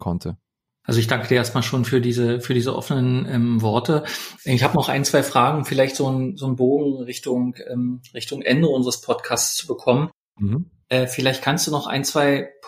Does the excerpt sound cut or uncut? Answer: cut